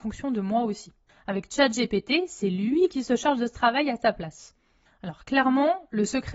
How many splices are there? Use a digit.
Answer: 2